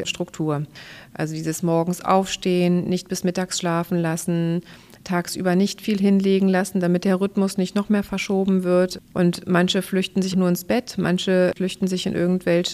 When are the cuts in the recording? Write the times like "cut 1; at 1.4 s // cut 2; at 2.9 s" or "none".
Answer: cut 1; at 9.1 s // cut 2; at 10.3 s

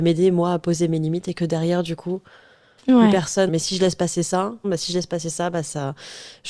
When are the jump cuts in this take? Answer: cut 1; at 3.5 s // cut 2; at 4.6 s

